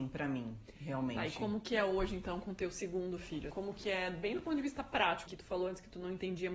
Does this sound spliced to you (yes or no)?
yes